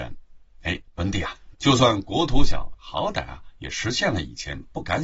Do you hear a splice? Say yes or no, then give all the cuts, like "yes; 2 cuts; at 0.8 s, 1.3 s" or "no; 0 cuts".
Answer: yes; 2 cuts; at 1.5 s, 2.7 s